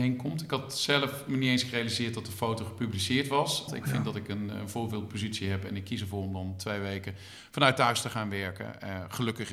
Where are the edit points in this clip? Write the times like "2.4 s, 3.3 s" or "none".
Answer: 3.7 s